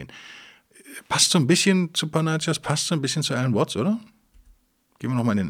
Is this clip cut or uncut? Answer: uncut